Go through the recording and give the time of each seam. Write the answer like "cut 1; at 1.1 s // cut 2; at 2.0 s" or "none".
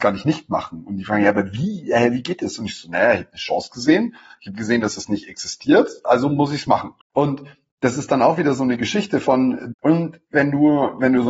cut 1; at 7.0 s // cut 2; at 9.7 s